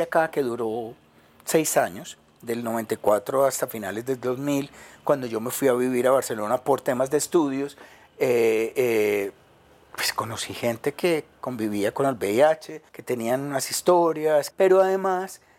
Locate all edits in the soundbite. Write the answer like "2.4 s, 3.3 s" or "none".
12.9 s, 14.5 s